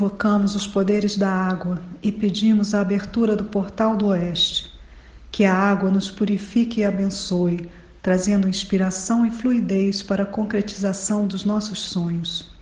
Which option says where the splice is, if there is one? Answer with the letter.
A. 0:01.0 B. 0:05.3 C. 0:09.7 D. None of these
D